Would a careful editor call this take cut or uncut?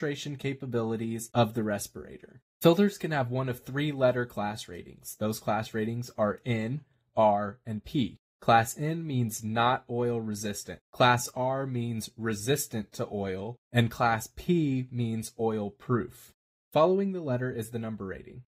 uncut